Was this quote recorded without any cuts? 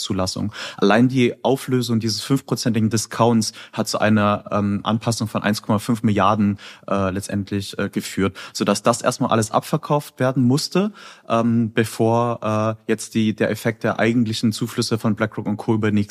yes; 0 cuts

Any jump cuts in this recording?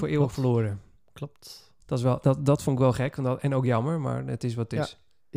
no; 0 cuts

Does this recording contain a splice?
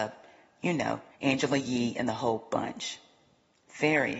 yes; 1 cut; at 1.1 s

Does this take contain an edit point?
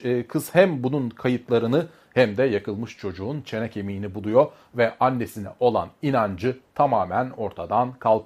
no; 0 cuts

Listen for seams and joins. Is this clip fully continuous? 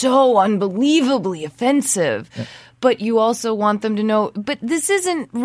yes; 0 cuts

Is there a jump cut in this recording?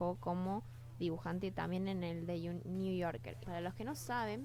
yes; 1 cut; at 3.4 s

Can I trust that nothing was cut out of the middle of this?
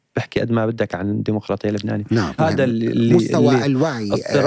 no; 1 cut; at 2.4 s

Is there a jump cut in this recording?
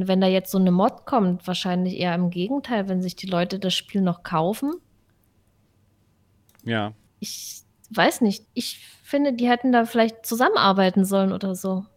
yes; 2 cuts; at 7.1 s, 8.5 s

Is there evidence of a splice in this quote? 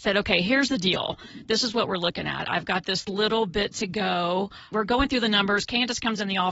yes; 1 cut; at 4.7 s

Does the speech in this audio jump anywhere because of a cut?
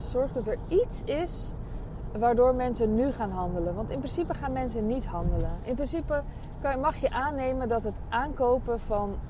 no; 0 cuts

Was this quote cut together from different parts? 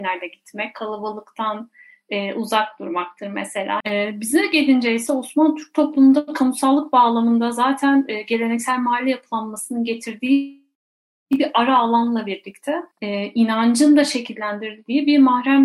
yes; 2 cuts; at 3.8 s, 12.9 s

